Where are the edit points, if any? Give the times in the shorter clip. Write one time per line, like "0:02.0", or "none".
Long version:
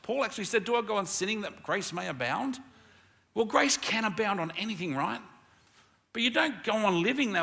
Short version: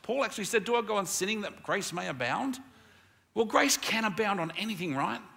none